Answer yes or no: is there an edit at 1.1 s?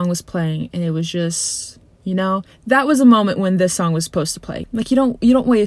no